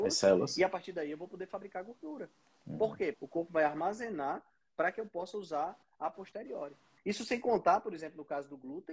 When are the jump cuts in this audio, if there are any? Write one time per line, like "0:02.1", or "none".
0:03.1
0:07.0